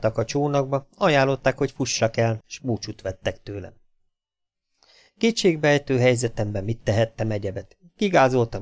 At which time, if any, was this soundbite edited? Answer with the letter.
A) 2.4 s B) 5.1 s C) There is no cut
A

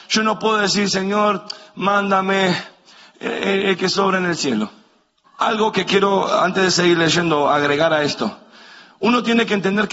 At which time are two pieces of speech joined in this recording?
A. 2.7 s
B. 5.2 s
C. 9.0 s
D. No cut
B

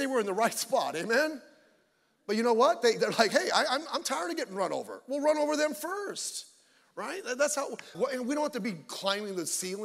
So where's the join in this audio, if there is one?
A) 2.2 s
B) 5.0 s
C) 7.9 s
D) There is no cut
C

